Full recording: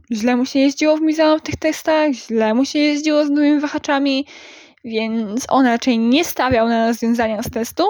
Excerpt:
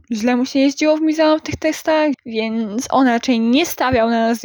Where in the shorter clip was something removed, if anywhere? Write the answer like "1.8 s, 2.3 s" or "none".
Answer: 2.1 s

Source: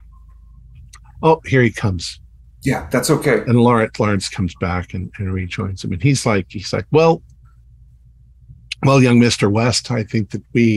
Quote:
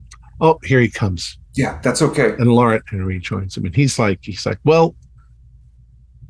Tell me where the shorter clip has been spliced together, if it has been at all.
1.5 s, 2.8 s

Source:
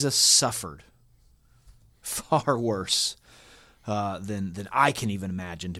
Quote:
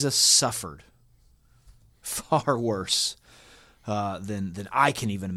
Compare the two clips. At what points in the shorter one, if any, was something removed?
none

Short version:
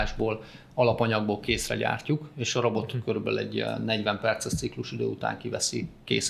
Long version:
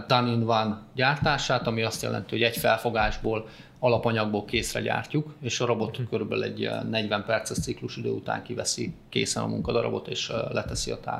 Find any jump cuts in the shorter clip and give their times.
none

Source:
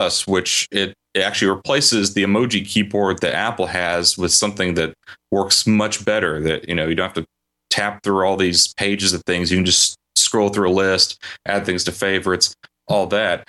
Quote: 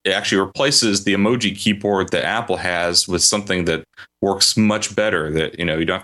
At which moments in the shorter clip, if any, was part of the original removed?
none

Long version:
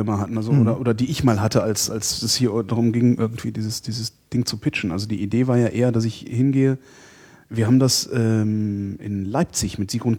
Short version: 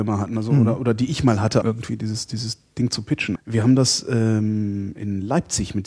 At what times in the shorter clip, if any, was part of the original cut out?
1.6 s, 3.4 s

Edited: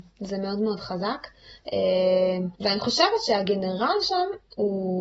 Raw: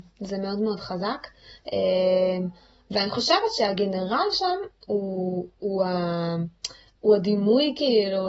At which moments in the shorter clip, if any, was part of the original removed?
2.6 s

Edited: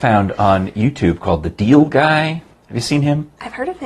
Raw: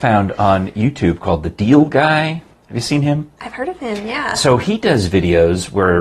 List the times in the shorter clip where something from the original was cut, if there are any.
none

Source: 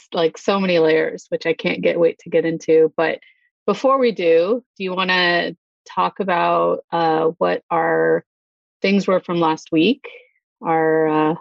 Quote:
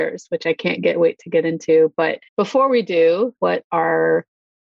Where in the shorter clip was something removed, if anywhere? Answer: 2.3 s, 3.4 s

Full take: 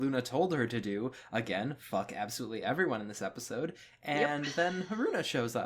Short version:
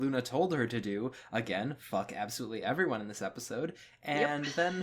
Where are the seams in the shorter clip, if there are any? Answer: none

